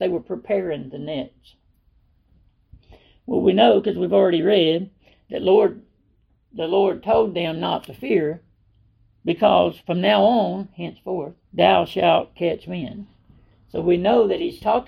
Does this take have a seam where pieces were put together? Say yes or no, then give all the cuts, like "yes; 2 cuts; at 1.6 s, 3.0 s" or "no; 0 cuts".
yes; 1 cut; at 11.4 s